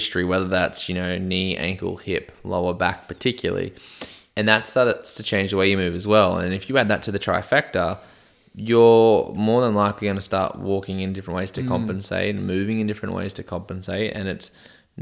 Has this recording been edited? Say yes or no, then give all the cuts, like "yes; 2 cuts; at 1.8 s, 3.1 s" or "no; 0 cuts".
no; 0 cuts